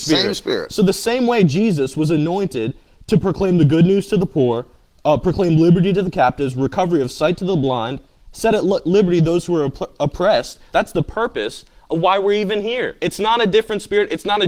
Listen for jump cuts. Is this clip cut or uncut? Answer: cut